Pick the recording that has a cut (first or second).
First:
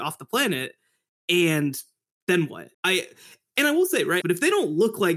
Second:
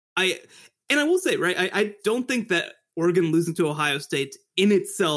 first